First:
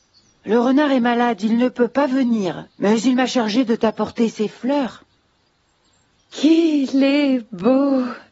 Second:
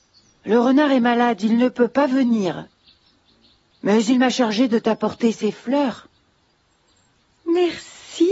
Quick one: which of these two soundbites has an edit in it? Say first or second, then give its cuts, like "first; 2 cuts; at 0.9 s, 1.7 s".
first; 2 cuts; at 2.7 s, 6.2 s